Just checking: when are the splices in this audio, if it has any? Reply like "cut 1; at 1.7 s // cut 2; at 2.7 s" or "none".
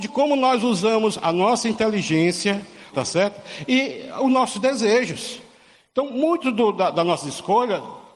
cut 1; at 2.9 s